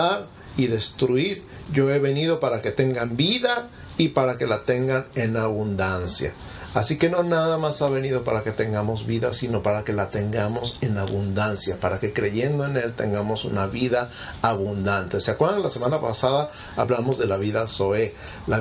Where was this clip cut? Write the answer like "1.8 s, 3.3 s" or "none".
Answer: none